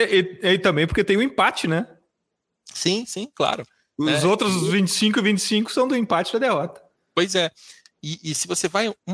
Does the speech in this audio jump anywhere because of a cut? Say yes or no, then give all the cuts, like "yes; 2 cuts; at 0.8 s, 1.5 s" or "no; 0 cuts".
no; 0 cuts